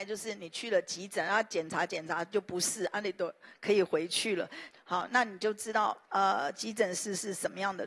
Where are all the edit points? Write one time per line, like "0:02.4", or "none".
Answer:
0:04.7